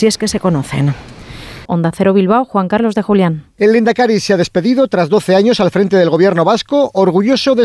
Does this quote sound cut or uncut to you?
cut